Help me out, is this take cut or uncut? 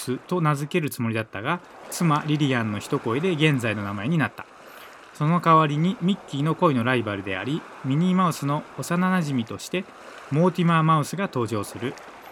uncut